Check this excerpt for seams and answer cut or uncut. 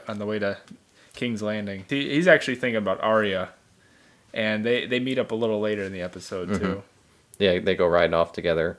cut